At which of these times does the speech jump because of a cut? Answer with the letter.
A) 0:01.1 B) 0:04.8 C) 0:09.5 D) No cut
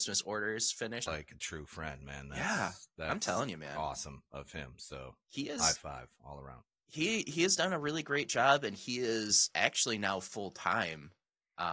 A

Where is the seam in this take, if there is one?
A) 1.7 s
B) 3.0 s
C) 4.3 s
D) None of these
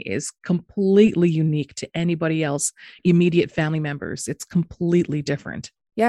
B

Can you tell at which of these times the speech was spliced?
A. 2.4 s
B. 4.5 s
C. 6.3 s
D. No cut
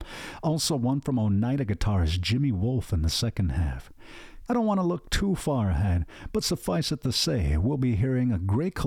B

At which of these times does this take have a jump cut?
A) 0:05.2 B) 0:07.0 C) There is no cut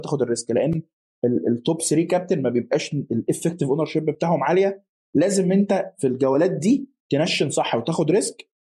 B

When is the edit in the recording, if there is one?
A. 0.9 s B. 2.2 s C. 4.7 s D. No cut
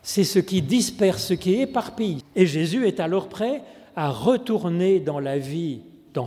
B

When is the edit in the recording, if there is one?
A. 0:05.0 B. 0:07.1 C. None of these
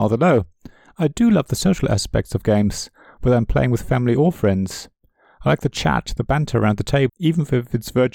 B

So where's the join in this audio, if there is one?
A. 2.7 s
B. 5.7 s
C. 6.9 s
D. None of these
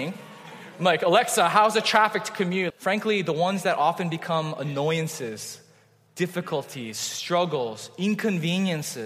A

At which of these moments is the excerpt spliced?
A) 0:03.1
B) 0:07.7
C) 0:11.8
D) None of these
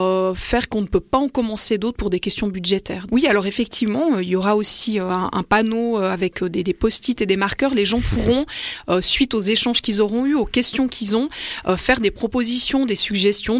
A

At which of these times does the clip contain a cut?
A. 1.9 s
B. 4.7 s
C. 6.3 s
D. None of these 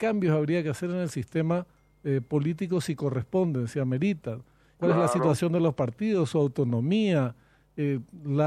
B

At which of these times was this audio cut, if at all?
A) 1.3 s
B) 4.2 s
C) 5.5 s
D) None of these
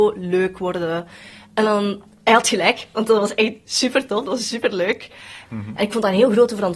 C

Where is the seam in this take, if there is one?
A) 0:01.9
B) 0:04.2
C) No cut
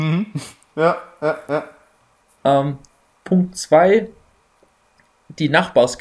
C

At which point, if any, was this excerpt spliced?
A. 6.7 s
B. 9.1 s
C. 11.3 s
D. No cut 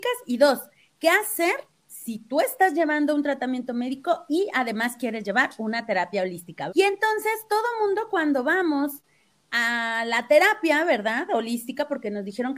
A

